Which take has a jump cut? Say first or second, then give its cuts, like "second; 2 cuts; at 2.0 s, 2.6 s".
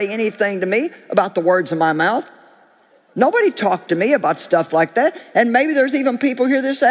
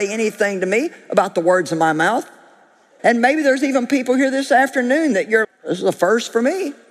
second; 2 cuts; at 3.0 s, 5.4 s